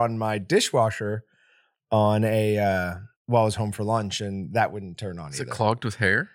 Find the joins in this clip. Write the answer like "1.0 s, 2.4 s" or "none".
3.2 s